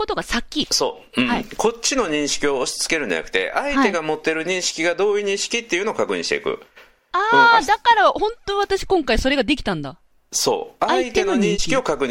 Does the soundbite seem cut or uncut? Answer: uncut